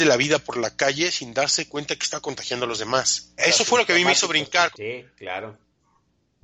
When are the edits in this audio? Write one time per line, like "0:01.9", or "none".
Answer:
0:03.4
0:04.7